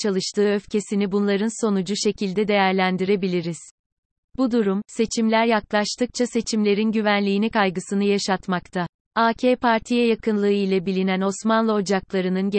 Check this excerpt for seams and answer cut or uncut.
cut